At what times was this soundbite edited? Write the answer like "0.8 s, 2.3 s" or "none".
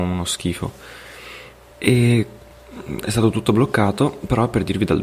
1.7 s